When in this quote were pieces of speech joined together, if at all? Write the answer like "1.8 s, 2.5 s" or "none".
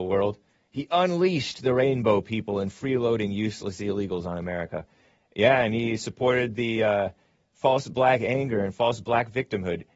none